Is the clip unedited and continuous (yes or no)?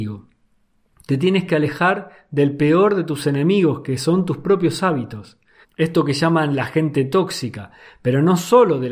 no